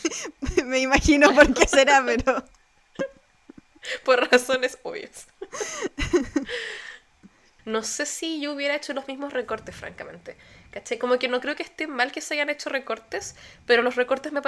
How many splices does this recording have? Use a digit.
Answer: 1